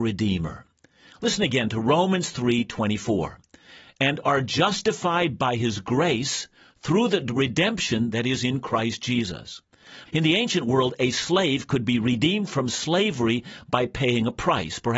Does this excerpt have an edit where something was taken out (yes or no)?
yes